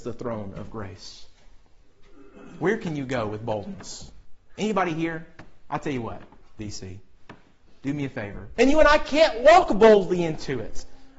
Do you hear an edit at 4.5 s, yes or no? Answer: no